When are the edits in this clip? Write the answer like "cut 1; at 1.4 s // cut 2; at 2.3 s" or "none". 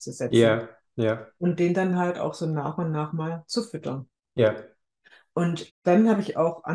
cut 1; at 5.7 s